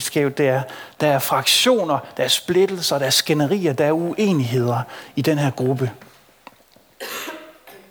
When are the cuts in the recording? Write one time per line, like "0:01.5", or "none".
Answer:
none

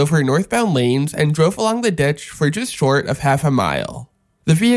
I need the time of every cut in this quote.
none

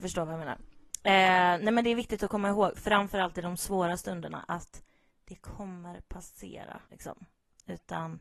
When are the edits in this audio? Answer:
0:06.9

